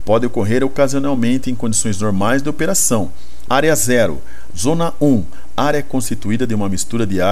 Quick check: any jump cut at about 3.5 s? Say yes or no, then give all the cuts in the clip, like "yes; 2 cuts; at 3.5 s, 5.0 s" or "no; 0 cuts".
yes; 2 cuts; at 3.5 s, 4.5 s